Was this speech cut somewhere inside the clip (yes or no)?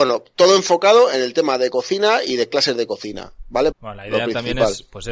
yes